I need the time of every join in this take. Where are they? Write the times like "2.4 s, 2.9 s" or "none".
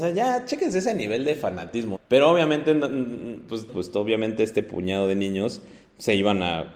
1.9 s, 3.7 s